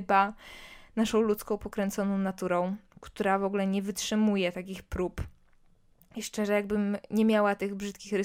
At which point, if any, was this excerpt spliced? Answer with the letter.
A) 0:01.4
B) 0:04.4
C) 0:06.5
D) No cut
D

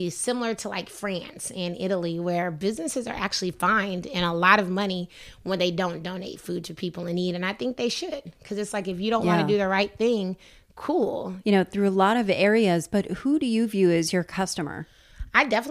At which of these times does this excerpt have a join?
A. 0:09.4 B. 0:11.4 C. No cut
B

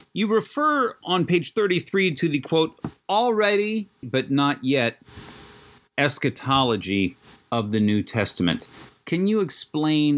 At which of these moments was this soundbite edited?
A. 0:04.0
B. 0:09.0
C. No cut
A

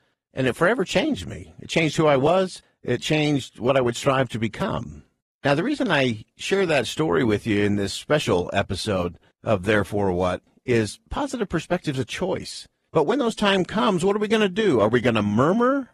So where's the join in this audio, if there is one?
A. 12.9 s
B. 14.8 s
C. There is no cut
A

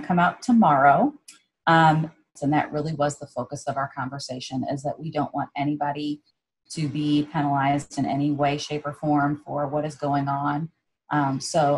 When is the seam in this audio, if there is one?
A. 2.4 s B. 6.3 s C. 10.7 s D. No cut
A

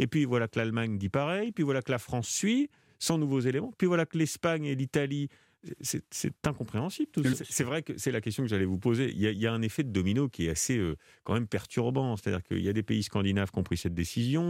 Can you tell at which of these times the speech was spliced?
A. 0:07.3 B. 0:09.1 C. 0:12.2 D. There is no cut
A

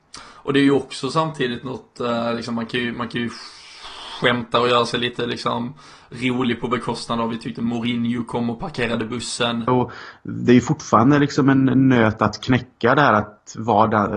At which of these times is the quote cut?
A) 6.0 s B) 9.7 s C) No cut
B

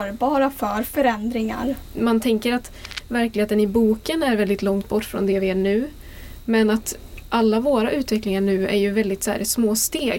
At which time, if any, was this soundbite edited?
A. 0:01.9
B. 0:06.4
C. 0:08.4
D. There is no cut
D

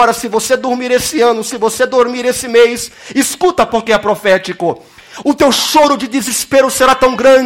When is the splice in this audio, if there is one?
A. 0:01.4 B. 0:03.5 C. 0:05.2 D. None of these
C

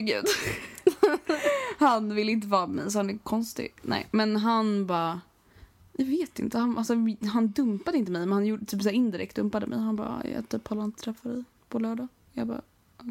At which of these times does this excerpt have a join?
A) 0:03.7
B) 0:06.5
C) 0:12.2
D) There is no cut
D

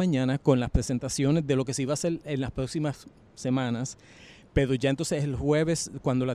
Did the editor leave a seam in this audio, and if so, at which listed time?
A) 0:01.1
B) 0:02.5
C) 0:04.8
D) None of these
D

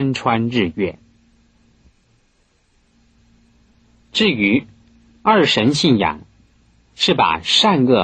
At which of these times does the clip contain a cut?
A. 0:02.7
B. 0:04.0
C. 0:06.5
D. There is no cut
D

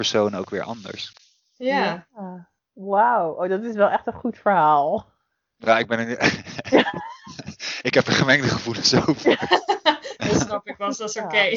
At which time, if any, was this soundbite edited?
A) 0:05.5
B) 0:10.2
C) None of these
B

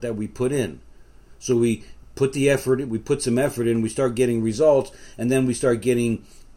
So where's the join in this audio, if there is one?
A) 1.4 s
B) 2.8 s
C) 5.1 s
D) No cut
B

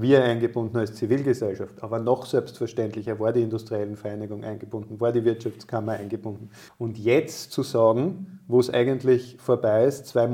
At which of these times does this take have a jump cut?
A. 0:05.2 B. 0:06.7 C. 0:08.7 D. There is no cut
B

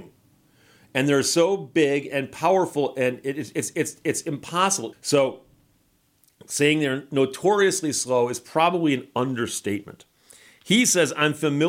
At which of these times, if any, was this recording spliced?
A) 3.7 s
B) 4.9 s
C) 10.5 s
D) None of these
B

